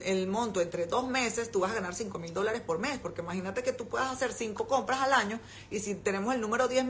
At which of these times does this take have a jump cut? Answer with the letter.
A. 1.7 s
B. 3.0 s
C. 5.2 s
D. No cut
B